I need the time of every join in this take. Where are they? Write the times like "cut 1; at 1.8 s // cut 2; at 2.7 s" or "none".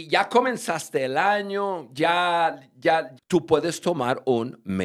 cut 1; at 3.2 s